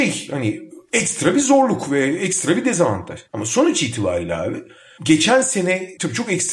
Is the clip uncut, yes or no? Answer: no